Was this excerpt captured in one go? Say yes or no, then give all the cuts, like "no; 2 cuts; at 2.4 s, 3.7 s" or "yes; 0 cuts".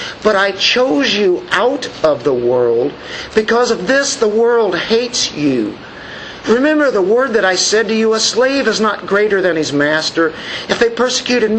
yes; 0 cuts